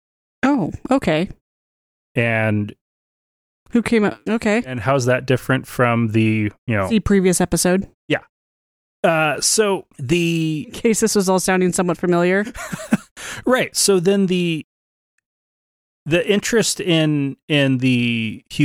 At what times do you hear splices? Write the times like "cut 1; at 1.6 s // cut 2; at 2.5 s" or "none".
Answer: cut 1; at 4.3 s